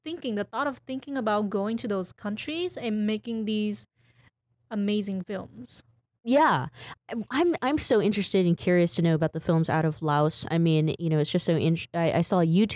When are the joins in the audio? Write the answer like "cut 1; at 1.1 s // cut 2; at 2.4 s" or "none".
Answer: none